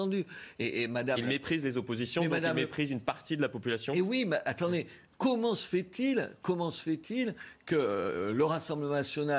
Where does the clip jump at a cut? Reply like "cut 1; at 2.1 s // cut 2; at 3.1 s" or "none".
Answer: none

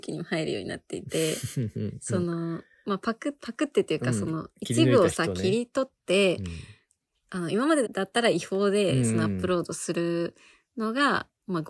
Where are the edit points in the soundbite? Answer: cut 1; at 7.8 s

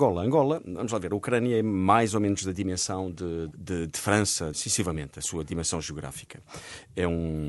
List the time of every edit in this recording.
cut 1; at 3.5 s // cut 2; at 4.5 s

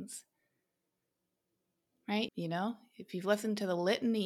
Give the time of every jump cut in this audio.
cut 1; at 2.3 s

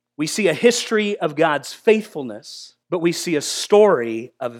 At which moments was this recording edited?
cut 1; at 2.8 s

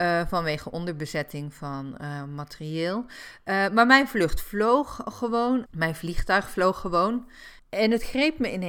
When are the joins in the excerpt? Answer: cut 1; at 5.7 s // cut 2; at 7.6 s

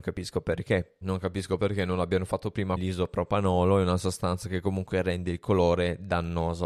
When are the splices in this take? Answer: cut 1; at 1.0 s // cut 2; at 2.8 s

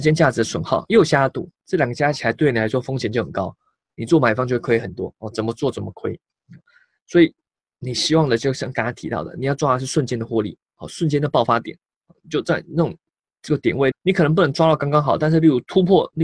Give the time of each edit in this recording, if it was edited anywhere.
cut 1; at 13.9 s

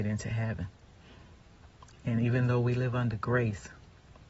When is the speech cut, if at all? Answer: cut 1; at 1.9 s

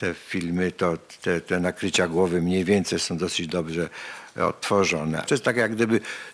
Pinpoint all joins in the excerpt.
cut 1; at 5.3 s

